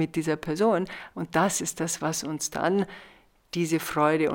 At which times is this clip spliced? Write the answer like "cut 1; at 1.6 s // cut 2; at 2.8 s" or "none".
cut 1; at 1.1 s